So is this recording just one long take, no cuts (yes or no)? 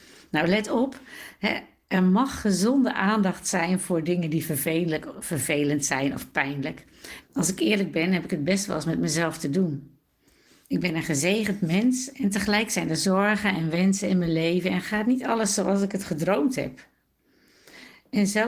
no